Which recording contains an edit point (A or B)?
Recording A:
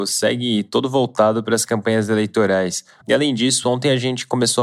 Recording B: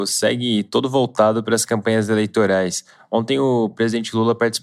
A